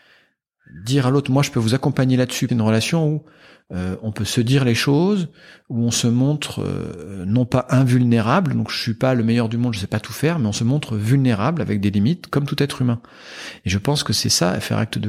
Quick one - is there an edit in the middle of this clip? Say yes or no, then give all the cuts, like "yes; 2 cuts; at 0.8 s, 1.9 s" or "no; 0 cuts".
yes; 1 cut; at 2.5 s